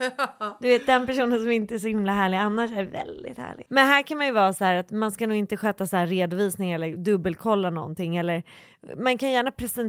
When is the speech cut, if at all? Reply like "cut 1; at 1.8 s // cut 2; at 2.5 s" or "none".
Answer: cut 1; at 3.7 s